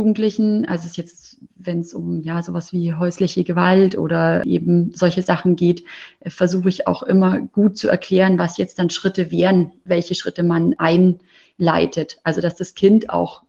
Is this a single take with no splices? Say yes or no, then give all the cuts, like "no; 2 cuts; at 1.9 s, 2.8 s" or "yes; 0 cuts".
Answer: yes; 0 cuts